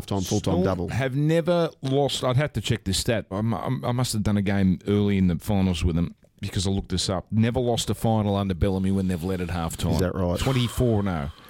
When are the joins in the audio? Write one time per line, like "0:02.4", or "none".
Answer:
0:03.3